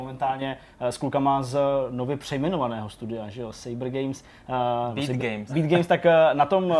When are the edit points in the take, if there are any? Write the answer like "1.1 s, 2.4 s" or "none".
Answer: 5.5 s